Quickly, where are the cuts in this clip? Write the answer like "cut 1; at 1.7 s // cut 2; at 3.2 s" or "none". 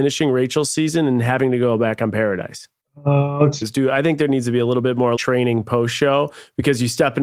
cut 1; at 3.6 s // cut 2; at 5.2 s